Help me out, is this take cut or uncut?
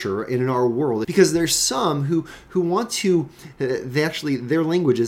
cut